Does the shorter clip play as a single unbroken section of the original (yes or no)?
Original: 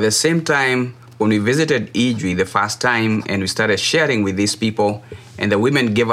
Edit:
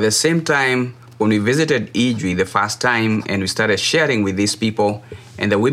yes